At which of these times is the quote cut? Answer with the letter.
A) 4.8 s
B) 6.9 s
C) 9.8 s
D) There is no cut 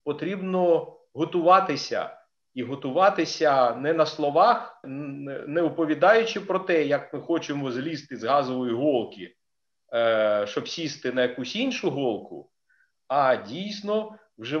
A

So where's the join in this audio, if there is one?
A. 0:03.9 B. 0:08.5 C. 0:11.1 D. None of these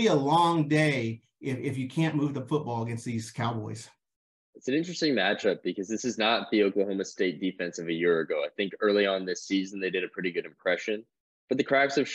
D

